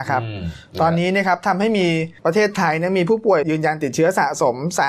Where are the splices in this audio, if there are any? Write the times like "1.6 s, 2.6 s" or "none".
2.2 s, 3.4 s